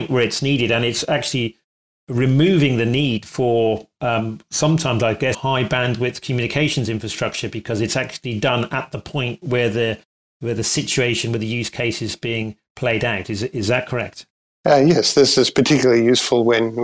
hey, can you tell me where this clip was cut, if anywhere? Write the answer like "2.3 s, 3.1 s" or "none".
5.3 s